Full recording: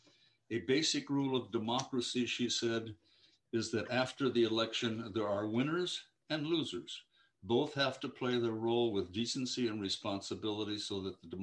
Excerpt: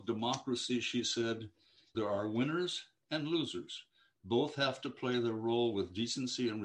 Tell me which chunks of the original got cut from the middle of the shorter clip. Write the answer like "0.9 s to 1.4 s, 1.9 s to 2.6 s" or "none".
3.4 s to 5.1 s